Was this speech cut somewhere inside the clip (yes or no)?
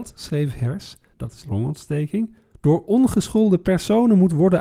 yes